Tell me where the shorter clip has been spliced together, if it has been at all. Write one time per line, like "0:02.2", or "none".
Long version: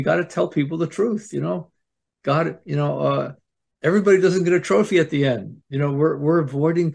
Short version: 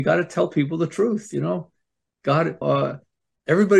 0:02.6

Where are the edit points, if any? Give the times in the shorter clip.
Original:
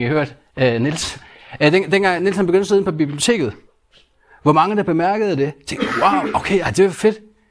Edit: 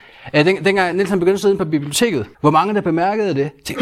0:02.3

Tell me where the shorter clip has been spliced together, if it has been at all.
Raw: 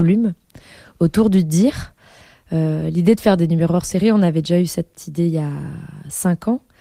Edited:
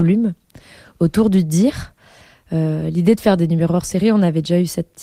none

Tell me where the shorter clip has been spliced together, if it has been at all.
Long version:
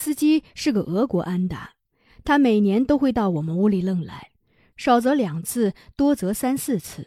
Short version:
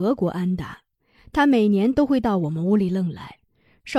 none

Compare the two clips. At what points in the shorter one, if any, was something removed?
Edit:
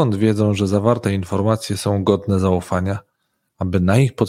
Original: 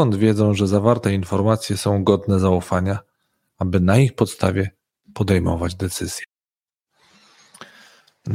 none

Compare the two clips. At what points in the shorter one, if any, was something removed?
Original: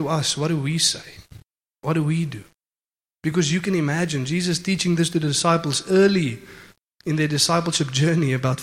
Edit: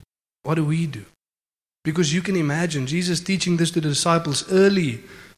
none

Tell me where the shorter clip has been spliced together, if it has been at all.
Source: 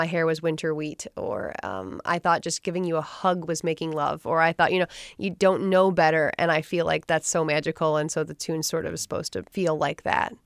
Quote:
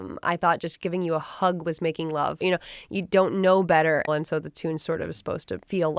0:02.4
0:04.1

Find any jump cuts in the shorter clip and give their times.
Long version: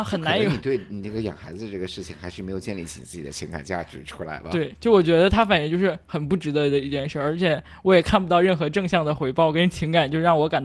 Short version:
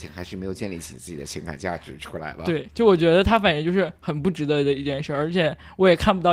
none

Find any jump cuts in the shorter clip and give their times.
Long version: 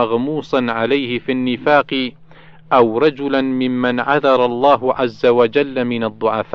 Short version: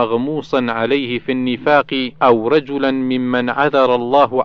0:02.2

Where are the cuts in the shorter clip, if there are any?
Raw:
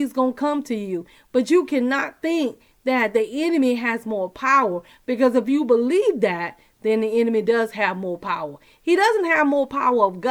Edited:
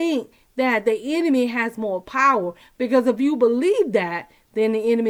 none

